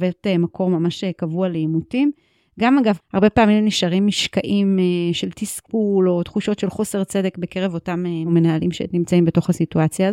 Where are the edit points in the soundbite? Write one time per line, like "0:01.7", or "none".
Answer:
0:03.0